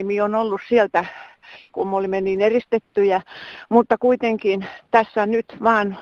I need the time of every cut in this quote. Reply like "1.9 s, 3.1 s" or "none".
1.7 s